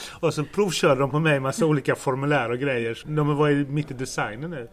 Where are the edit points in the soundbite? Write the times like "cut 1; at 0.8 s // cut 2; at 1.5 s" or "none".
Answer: cut 1; at 3.0 s